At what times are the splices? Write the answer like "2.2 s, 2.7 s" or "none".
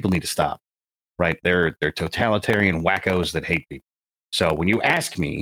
1.4 s